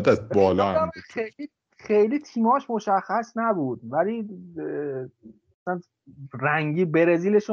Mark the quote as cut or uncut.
uncut